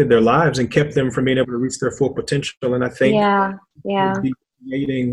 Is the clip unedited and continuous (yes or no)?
yes